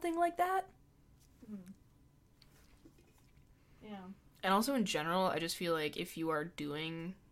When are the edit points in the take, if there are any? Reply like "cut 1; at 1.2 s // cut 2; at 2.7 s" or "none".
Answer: none